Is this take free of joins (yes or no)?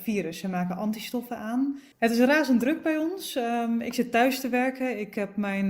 no